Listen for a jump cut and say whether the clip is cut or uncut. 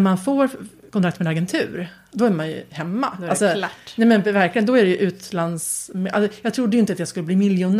uncut